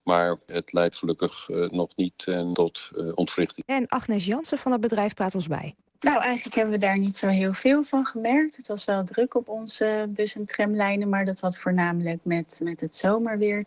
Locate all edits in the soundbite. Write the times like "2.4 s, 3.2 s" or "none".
3.7 s, 12.6 s